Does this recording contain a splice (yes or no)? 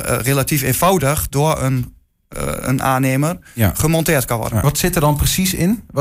yes